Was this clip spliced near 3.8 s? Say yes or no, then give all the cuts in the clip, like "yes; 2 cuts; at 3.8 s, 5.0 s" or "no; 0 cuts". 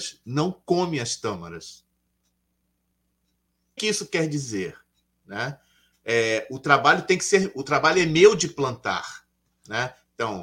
yes; 1 cut; at 3.8 s